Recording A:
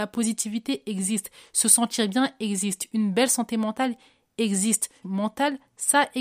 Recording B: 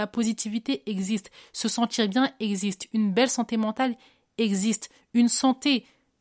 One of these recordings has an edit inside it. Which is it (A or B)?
A